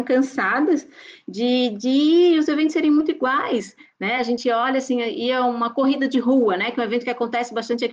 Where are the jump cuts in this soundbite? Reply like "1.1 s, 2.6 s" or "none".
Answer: none